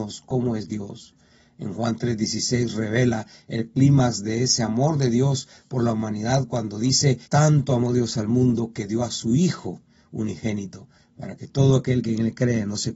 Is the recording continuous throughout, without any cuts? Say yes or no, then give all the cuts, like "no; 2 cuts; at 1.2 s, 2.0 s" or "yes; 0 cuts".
no; 1 cut; at 7.3 s